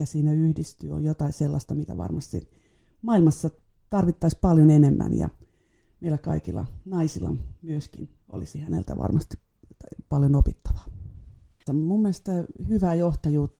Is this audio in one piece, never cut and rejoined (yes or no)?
no